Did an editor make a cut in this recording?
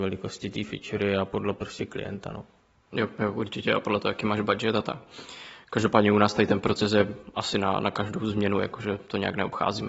no; 0 cuts

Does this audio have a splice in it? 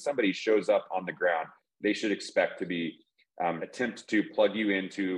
yes; 1 cut; at 3.6 s

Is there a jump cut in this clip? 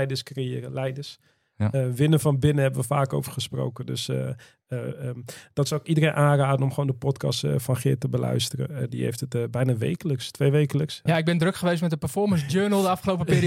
yes; 1 cut; at 11.1 s

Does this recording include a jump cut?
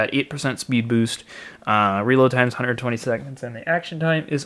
no; 0 cuts

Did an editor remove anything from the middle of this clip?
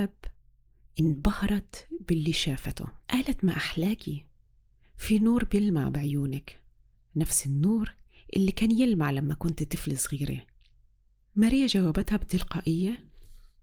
yes; 1 cut; at 3.0 s

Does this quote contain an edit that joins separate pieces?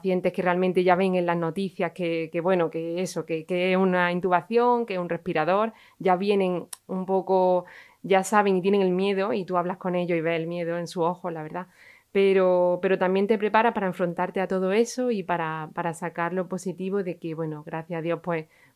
no; 0 cuts

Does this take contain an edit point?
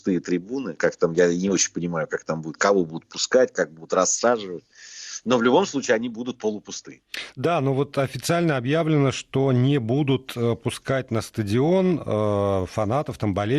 no; 0 cuts

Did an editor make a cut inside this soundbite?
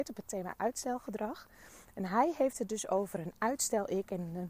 no; 0 cuts

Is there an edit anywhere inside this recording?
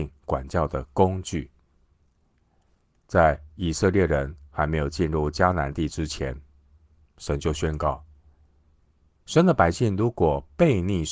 no; 0 cuts

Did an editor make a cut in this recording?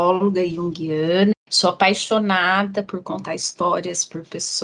yes; 1 cut; at 1.3 s

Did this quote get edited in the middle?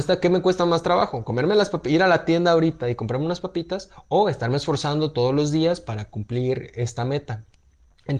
no; 0 cuts

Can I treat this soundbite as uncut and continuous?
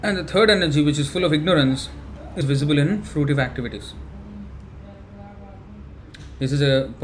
no; 1 cut; at 2.4 s

